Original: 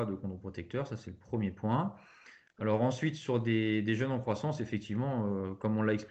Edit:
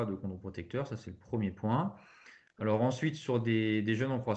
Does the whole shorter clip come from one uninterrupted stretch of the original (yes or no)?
yes